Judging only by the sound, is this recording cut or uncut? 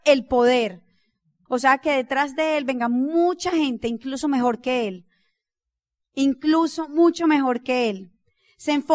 cut